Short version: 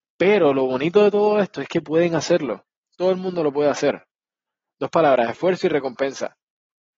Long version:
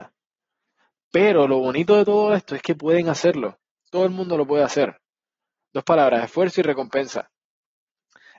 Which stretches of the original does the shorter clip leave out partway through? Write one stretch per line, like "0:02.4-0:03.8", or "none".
none